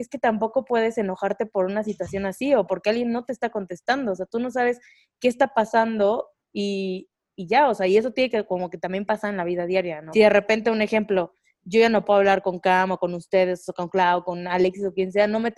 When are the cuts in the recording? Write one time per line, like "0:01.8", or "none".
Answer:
0:10.1